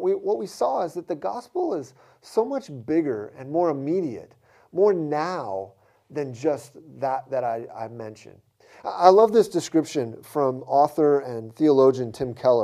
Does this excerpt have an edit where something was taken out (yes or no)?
no